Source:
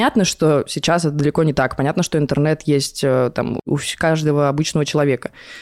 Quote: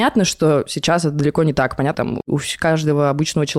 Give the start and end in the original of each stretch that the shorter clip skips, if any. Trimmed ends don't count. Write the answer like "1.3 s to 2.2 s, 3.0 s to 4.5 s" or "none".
1.9 s to 3.3 s